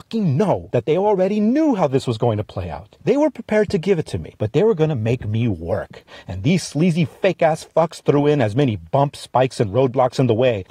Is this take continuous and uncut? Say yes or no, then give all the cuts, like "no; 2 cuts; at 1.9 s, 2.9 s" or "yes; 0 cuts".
yes; 0 cuts